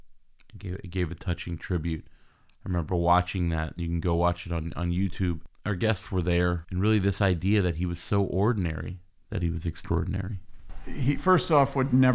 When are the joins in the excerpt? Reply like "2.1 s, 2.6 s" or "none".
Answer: 6.6 s